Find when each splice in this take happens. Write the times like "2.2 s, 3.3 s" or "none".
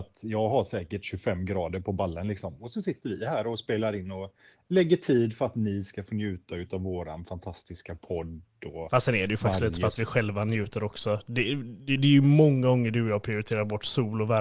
none